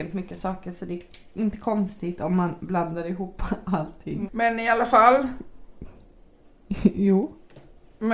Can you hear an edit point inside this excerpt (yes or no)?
yes